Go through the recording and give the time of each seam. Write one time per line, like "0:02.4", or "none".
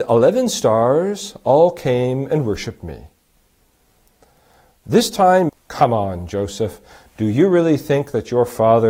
0:05.5